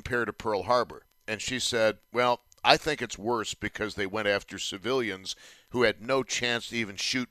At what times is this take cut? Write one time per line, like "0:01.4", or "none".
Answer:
none